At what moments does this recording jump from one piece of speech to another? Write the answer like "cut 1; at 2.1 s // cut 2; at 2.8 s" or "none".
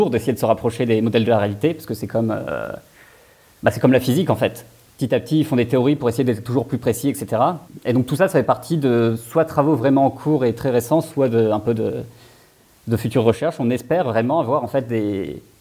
cut 1; at 7.8 s